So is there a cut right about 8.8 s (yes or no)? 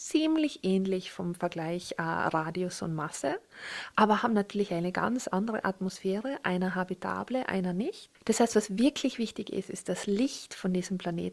no